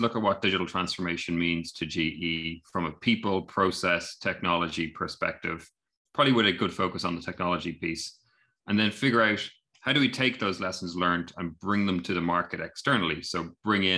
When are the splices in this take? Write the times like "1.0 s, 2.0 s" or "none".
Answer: none